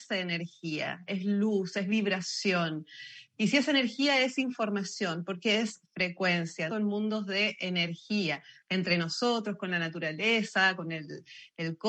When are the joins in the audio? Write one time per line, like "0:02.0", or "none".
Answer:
0:06.7